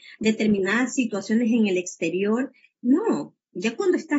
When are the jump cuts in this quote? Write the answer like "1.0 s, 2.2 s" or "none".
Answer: 2.7 s